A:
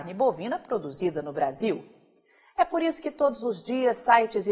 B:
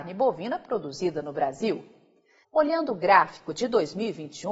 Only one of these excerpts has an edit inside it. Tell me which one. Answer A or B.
B